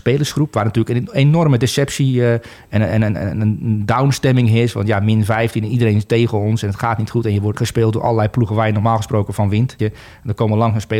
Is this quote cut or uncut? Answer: cut